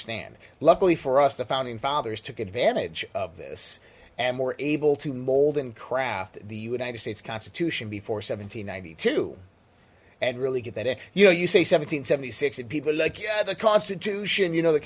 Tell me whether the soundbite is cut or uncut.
uncut